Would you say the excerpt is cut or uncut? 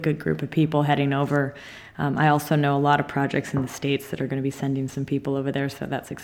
uncut